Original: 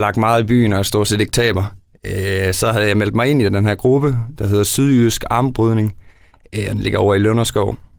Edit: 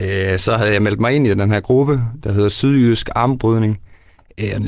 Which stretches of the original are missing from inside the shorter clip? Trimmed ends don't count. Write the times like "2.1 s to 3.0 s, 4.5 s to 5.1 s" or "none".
none